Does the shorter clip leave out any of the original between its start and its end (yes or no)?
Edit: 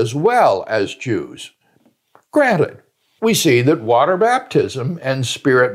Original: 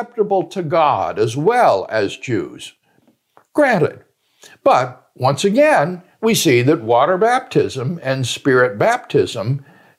yes